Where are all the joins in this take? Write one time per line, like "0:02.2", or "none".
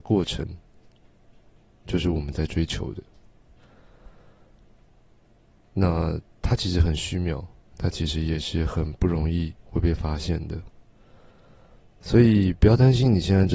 none